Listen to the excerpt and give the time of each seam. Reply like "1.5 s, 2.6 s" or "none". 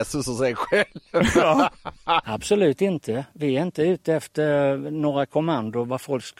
2.2 s